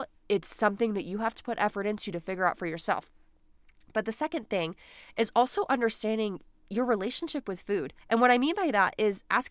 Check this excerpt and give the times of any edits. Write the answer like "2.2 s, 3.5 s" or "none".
8.0 s

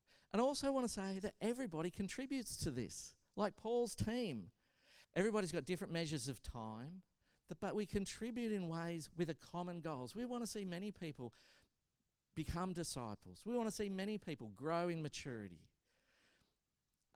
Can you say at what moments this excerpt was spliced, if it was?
5.0 s

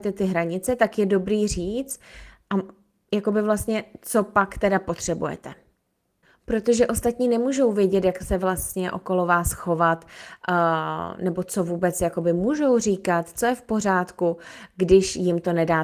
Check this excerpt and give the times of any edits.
none

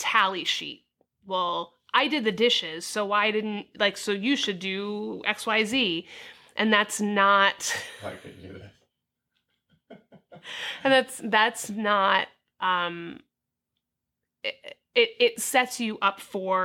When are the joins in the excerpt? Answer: none

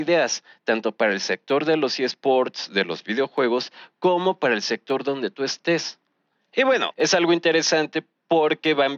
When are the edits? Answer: 6.9 s

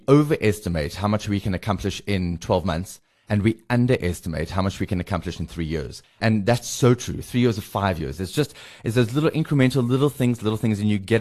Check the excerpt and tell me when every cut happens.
none

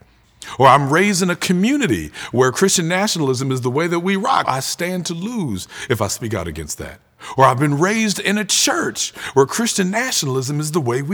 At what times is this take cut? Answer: 4.4 s

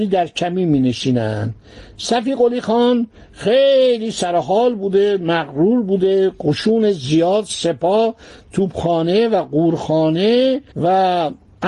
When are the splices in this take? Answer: 10.7 s

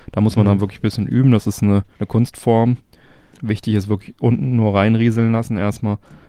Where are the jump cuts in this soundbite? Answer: 1.9 s

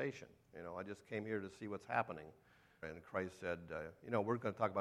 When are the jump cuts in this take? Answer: 2.8 s

